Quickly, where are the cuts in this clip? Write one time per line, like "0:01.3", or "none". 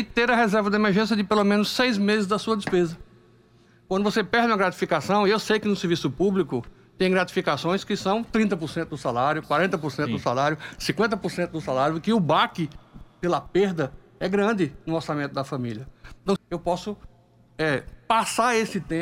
0:16.4